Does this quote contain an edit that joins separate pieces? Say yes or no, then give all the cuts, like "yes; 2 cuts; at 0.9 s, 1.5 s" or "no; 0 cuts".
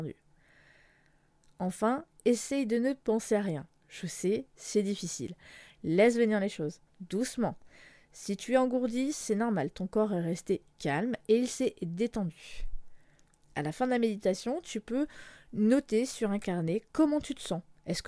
yes; 1 cut; at 6.9 s